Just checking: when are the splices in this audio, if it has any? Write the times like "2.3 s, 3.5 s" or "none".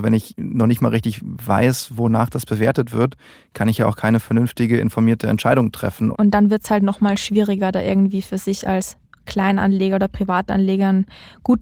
6.1 s